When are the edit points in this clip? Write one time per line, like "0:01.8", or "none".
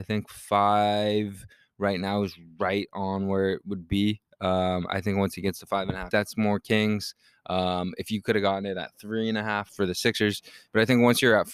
0:06.1
0:09.7

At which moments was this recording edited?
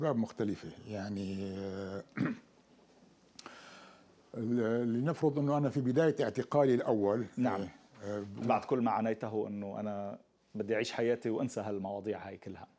0:08.4

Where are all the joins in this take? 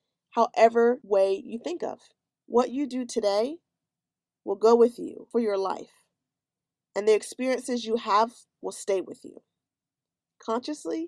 0:02.3

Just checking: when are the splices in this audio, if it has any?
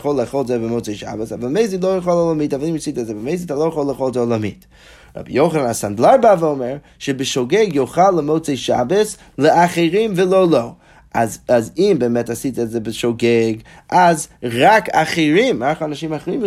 none

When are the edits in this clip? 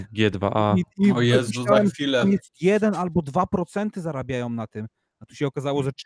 none

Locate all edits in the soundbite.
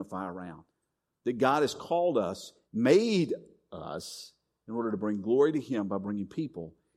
0:02.7

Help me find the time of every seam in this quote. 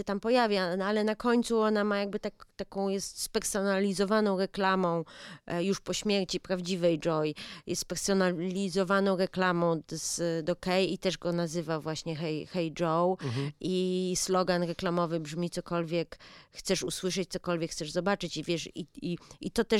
none

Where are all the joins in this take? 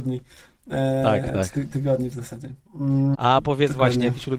0:03.1

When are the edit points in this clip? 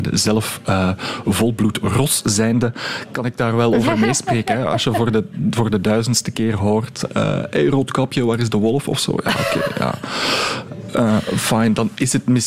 none

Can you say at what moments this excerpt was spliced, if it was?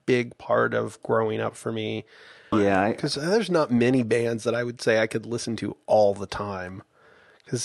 0:02.5

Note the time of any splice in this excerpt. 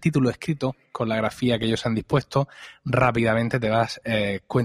none

